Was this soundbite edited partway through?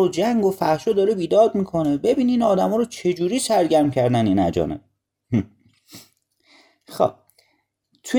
no; 0 cuts

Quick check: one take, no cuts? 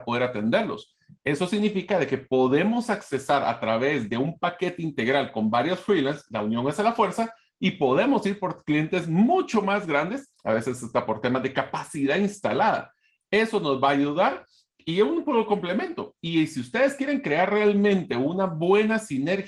no; 1 cut; at 10.3 s

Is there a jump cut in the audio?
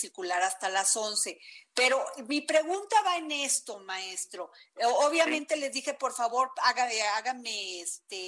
no; 0 cuts

